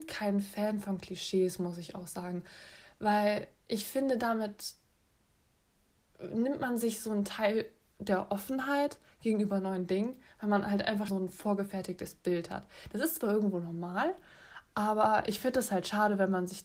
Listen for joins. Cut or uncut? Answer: cut